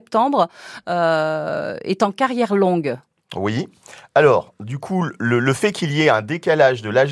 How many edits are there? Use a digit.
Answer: 0